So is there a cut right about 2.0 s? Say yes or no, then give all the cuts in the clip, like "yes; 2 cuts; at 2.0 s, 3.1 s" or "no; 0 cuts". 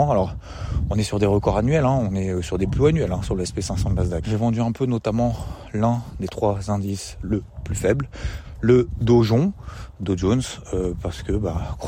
no; 1 cut; at 4.2 s